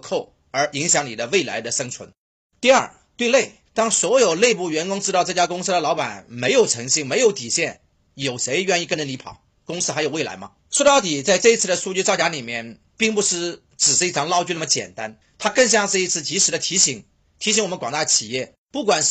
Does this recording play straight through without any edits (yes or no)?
no